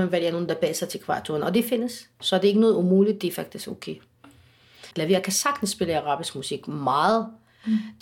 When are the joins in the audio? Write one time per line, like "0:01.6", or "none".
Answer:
0:04.9

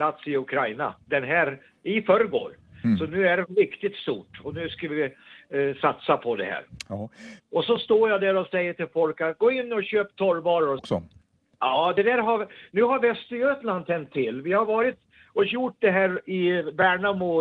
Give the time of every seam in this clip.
0:07.4
0:10.8

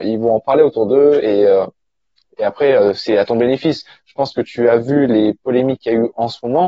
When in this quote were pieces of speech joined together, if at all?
none

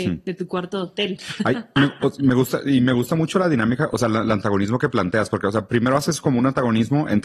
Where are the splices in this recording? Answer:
none

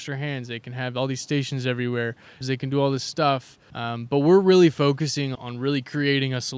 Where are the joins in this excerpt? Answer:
0:02.4
0:03.7
0:05.4

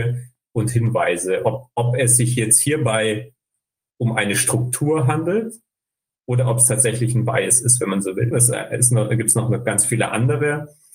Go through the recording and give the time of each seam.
0:08.3

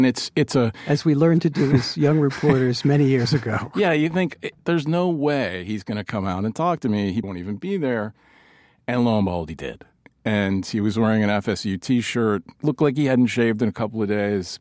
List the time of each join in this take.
0:07.2

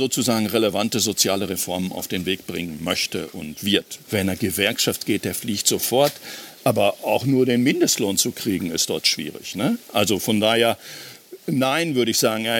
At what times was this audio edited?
0:04.0

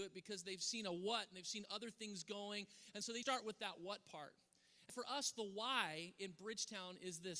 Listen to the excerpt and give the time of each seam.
0:03.2
0:04.9

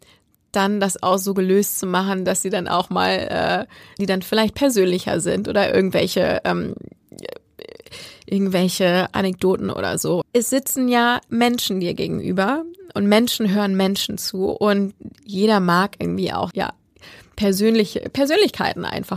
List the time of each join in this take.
0:04.0
0:10.2
0:16.5

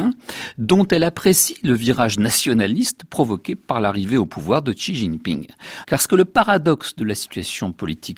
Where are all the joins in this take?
0:05.8

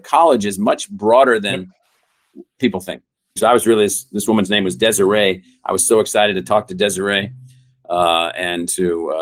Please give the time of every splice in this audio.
0:03.4

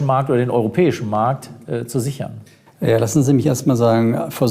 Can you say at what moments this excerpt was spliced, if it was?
none

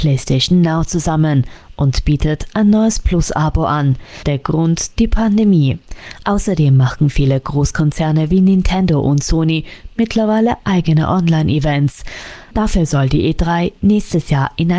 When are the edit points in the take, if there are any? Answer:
0:04.2

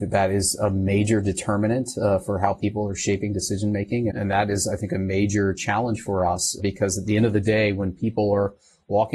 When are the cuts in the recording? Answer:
0:04.1
0:06.6

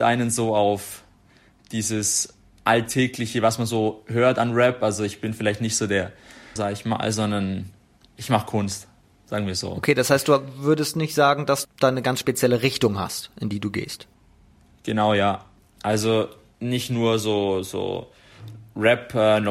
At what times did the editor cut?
0:06.6
0:11.6

